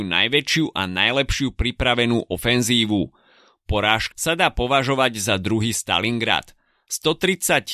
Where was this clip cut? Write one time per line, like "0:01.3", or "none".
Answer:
0:04.1